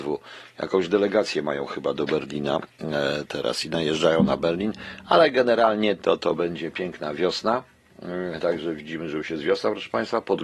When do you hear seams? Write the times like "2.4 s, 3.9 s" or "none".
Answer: none